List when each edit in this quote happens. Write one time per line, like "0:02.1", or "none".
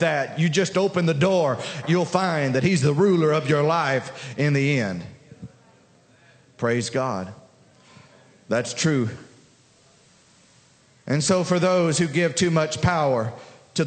0:01.8